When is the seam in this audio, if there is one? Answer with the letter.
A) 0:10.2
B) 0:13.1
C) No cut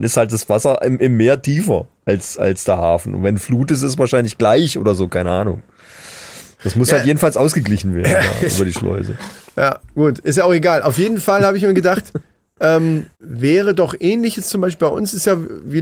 B